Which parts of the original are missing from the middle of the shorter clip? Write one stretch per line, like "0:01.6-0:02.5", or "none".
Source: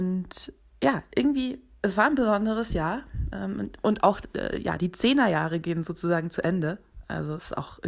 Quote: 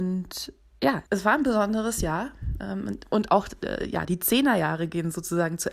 0:01.1-0:01.8